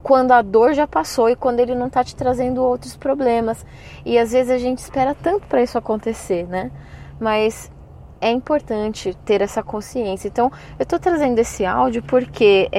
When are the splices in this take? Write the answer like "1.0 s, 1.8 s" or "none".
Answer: none